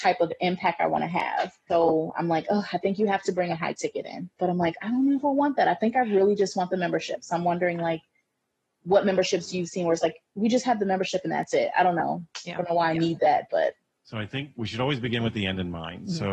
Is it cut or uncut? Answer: cut